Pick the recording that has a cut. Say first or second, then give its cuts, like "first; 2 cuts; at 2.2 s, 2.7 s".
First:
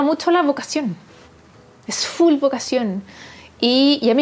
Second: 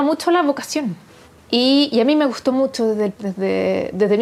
second; 2 cuts; at 1.4 s, 3.1 s